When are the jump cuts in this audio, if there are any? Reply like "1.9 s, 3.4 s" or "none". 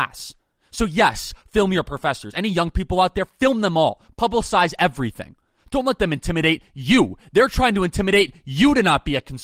none